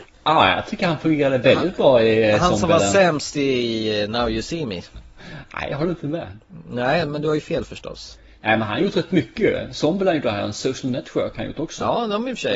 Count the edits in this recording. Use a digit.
0